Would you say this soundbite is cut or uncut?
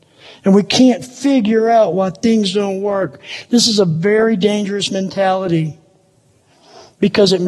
uncut